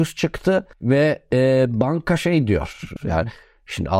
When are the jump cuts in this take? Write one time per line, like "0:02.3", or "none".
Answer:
0:03.0